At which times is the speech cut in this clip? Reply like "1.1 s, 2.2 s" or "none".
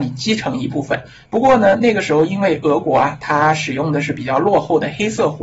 1.2 s